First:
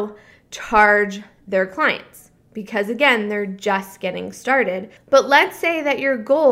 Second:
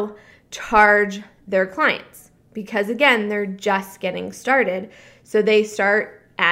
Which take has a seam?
first; 1 cut; at 5.0 s

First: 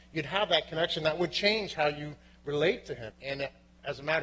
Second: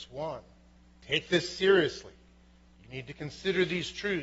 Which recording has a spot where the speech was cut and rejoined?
first; 1 cut; at 3.1 s

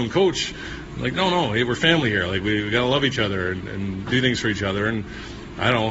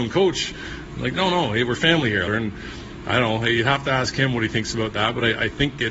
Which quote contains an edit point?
second; 1 cut; at 2.3 s

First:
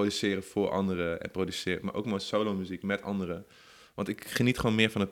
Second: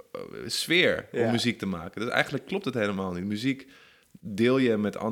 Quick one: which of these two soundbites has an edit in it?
first; 1 cut; at 1.8 s

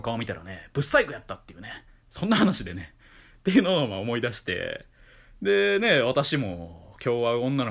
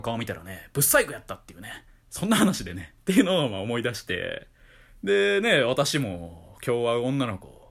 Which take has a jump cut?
second; 1 cut; at 3.0 s

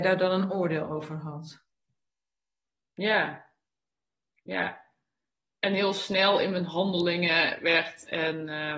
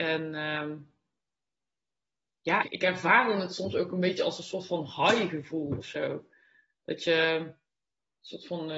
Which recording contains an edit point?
second; 1 cut; at 2.6 s

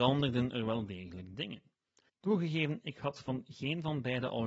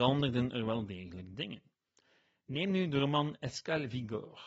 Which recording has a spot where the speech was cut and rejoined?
first; 1 cut; at 2.1 s

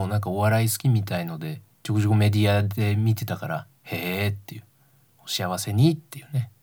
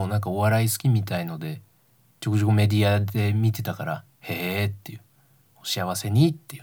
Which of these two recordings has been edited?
first; 1 cut; at 1.7 s

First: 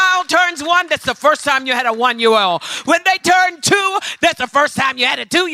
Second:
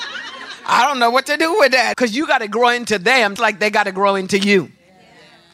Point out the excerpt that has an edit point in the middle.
second; 2 cuts; at 1.9 s, 3.4 s

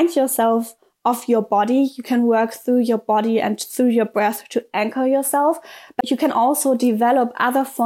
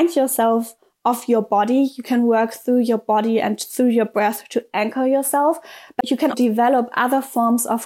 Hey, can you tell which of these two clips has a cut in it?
second; 1 cut; at 6.3 s

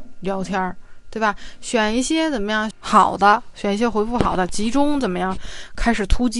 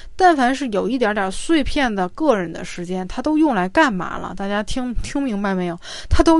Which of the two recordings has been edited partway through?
first; 1 cut; at 2.7 s

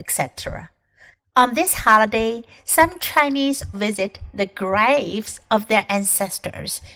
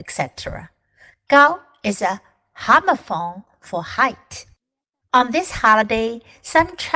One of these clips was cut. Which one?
first; 2 cuts; at 1.2 s, 3.7 s

